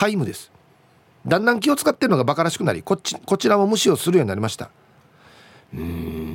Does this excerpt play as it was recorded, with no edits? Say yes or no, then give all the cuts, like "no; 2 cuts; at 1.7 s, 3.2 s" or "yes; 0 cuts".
yes; 0 cuts